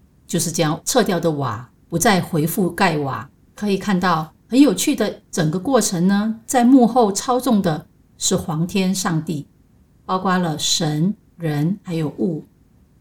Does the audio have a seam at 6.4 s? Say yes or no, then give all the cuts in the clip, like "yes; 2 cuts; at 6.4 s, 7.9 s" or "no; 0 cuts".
no; 2 cuts; at 3.5 s, 10.0 s